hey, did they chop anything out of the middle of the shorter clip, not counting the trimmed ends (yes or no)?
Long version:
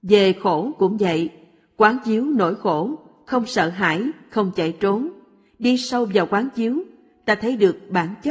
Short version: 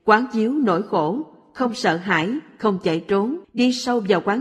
yes